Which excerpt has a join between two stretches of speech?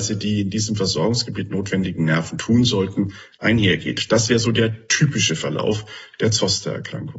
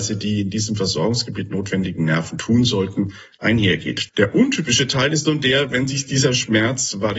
second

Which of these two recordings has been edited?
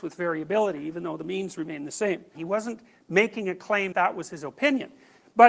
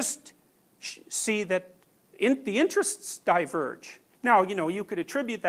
first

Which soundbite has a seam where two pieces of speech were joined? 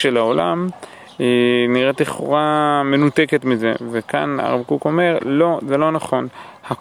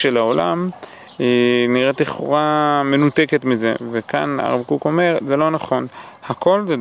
second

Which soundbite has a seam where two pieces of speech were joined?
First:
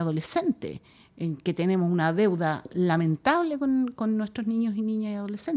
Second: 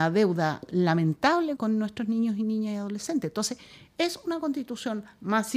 second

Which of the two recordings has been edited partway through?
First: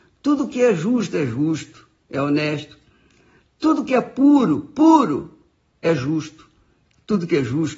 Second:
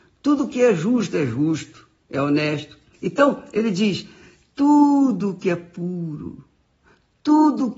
second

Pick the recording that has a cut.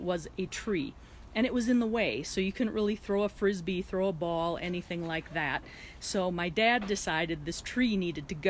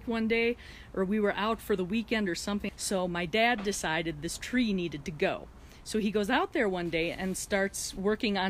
second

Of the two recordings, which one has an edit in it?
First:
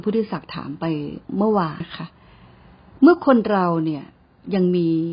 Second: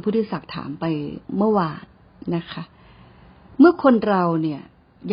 first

